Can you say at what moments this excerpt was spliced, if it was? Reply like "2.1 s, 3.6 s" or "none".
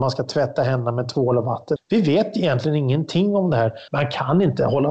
1.8 s, 3.9 s